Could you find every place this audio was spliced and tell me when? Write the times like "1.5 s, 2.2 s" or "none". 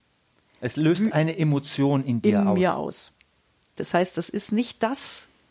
3.8 s